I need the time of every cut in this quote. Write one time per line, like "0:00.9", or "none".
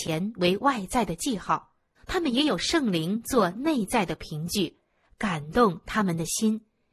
0:02.0